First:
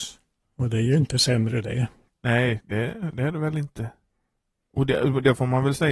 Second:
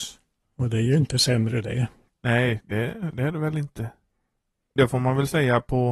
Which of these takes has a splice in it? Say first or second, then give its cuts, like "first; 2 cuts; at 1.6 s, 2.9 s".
second; 1 cut; at 4.8 s